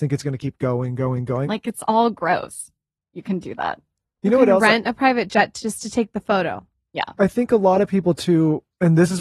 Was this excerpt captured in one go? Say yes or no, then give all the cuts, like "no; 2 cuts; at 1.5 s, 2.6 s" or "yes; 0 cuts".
no; 1 cut; at 1.4 s